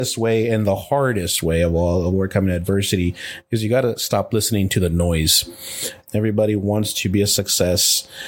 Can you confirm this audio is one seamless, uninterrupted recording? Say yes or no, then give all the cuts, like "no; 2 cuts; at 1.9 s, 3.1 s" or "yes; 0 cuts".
no; 1 cut; at 6.1 s